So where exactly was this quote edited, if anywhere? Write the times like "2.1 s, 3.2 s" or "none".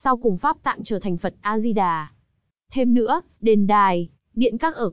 2.5 s